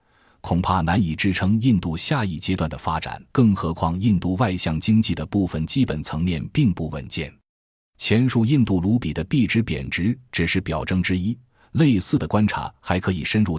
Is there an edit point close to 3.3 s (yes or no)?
yes